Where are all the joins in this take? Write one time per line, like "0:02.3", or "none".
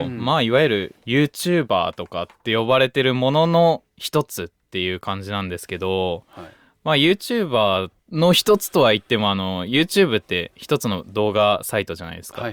0:08.0